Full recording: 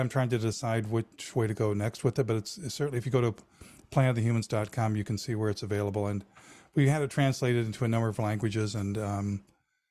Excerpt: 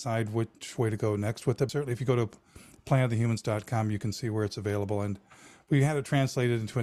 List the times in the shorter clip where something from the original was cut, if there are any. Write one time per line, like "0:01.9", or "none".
0:01.7